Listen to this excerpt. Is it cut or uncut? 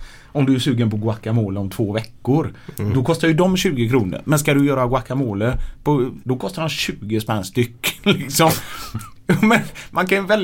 cut